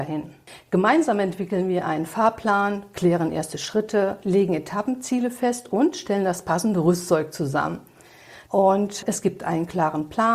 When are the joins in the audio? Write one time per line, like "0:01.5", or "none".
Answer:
0:08.5